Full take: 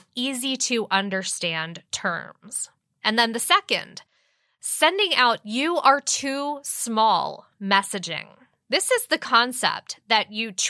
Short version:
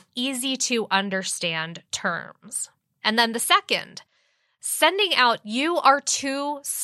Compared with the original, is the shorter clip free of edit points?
yes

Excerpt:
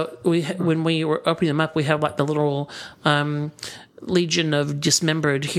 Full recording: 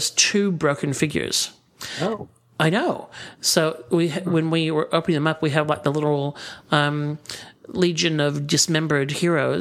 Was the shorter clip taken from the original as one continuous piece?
yes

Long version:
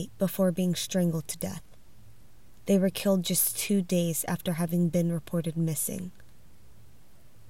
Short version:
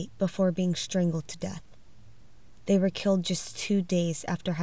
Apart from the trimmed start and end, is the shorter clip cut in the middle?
no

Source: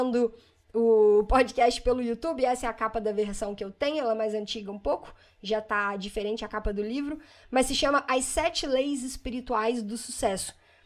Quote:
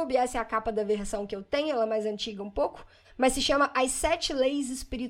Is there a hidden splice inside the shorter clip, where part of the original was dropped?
yes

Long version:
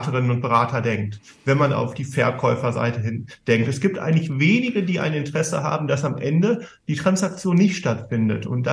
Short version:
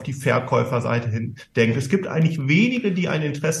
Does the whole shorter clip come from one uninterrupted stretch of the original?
yes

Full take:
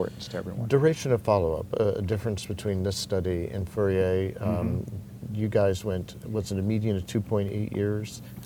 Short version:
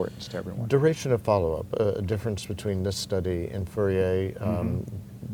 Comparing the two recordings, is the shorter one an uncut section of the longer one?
yes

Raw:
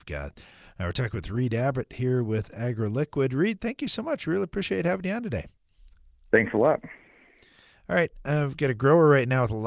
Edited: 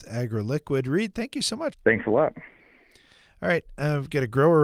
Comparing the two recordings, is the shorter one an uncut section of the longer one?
no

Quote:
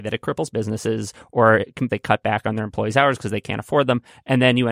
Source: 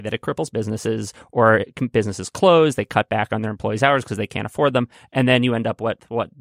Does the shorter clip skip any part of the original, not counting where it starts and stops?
yes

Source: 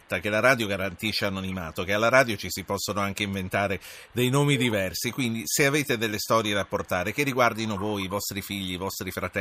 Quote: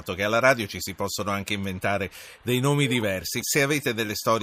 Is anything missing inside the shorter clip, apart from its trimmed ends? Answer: yes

